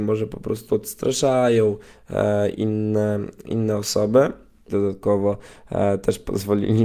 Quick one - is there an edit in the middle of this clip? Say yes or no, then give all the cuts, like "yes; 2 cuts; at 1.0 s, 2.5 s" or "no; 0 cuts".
yes; 1 cut; at 4.7 s